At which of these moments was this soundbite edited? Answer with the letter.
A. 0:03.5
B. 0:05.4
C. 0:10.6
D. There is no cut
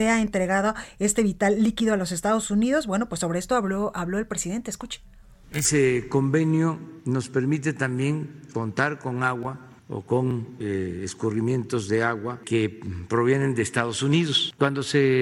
D